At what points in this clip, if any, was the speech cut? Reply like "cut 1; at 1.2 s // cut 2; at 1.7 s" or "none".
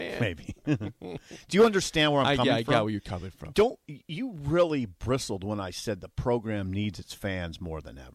none

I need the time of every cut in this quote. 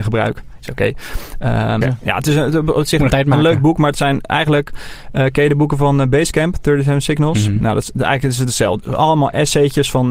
cut 1; at 1.8 s // cut 2; at 3.1 s

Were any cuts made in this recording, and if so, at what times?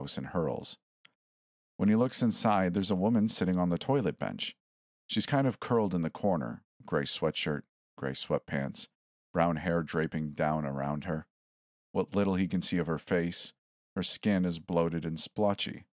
none

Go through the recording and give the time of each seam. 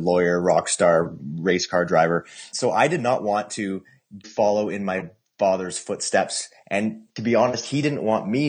cut 1; at 4.2 s

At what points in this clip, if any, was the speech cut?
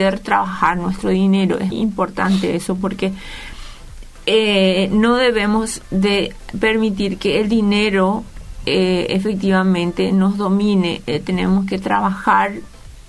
cut 1; at 1.7 s

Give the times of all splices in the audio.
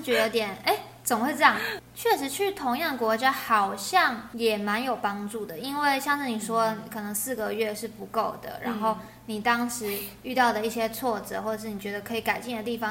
cut 1; at 1.8 s

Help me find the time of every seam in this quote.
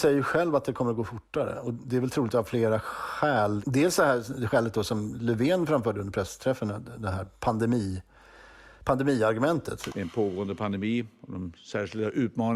none

